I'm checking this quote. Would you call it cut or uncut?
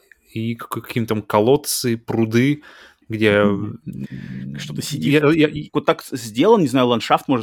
cut